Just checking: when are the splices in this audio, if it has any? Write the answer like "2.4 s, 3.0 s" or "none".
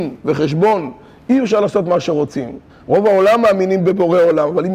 2.7 s